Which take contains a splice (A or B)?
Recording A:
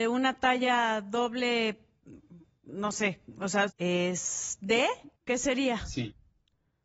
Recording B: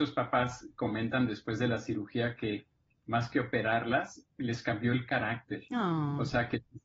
A